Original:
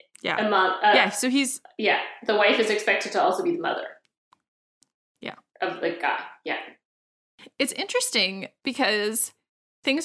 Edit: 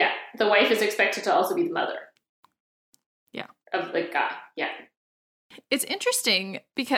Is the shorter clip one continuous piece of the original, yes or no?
yes